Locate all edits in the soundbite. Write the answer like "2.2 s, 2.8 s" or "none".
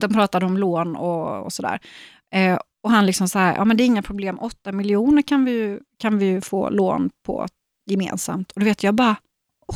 none